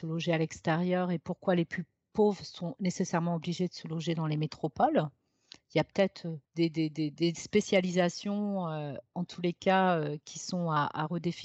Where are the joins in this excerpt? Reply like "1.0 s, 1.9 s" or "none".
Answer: 6.4 s

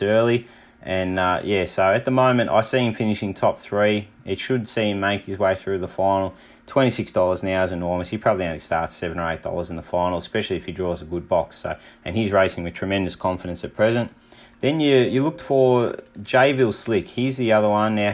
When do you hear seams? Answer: none

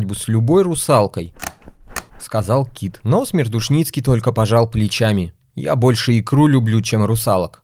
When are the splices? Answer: 2.1 s

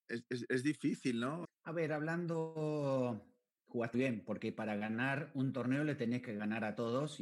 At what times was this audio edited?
1.4 s, 3.9 s

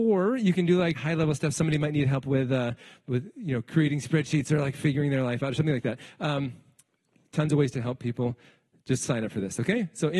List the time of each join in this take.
0.9 s

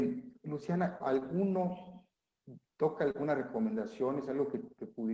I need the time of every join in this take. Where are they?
1.0 s, 2.7 s

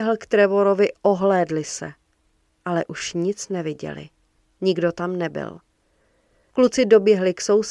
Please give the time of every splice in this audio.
6.5 s

